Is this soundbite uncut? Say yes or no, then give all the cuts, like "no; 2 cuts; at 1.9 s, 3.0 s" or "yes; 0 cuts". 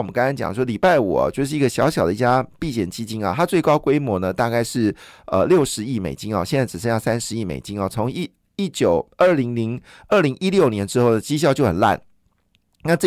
yes; 0 cuts